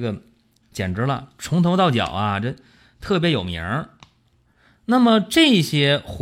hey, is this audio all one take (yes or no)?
yes